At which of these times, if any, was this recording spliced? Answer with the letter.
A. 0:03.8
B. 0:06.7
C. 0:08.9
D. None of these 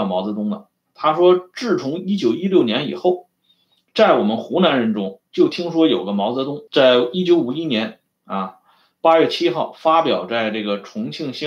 B